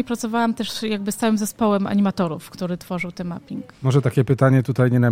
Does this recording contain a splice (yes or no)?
yes